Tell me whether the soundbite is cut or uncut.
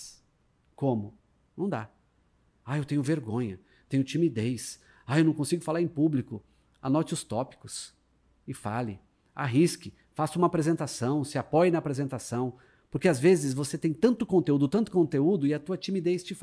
uncut